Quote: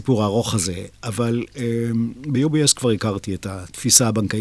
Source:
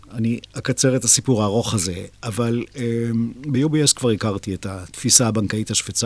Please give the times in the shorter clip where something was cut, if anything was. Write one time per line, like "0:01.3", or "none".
none